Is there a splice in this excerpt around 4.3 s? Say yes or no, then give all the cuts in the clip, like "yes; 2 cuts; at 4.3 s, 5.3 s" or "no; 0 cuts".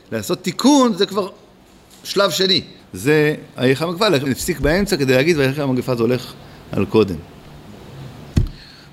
yes; 2 cuts; at 2.8 s, 4.3 s